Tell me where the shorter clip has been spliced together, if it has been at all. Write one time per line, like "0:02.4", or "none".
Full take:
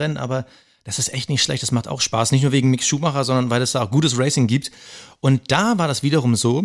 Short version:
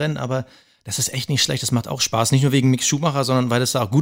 none